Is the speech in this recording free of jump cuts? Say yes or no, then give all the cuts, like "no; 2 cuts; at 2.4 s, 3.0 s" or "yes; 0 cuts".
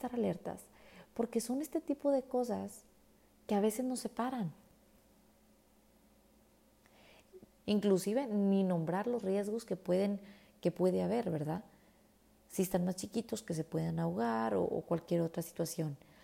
no; 1 cut; at 7.6 s